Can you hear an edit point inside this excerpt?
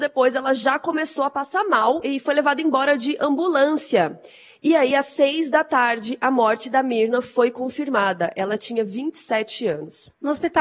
no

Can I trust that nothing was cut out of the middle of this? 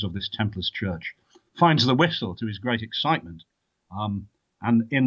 yes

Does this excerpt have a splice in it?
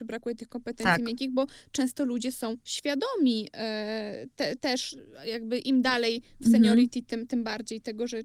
no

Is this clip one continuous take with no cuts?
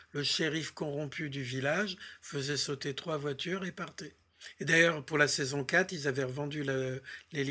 yes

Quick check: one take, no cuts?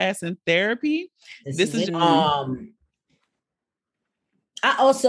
no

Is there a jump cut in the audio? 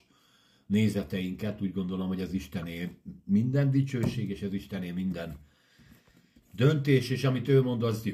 no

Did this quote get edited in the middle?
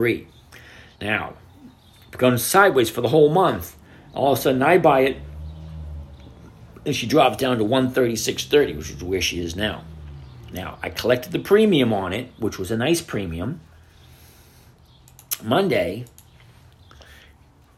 no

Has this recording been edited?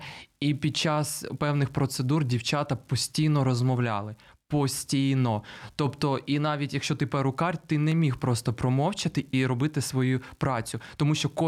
no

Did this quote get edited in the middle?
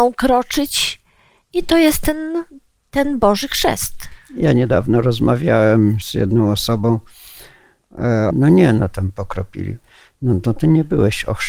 yes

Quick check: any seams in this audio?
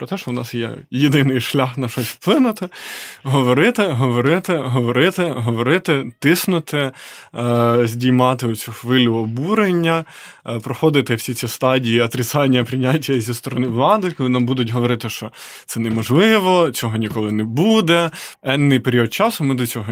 yes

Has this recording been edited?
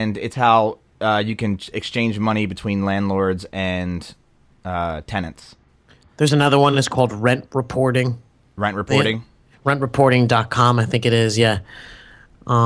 no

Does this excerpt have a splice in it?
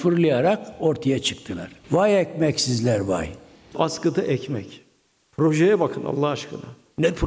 no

